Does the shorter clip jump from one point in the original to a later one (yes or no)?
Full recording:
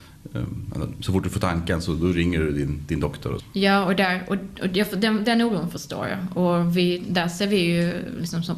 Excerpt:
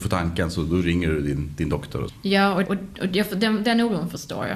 yes